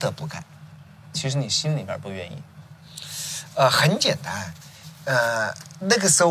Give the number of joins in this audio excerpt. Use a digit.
0